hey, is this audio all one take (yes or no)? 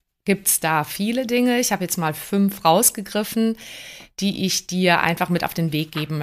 yes